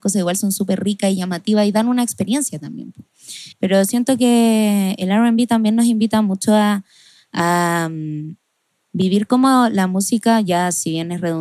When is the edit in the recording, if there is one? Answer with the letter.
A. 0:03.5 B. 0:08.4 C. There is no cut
A